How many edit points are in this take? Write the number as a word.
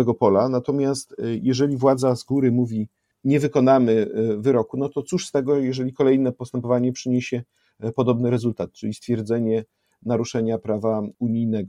zero